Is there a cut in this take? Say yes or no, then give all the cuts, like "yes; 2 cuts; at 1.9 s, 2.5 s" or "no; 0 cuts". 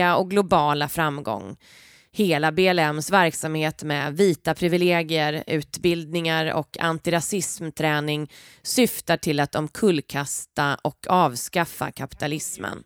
no; 0 cuts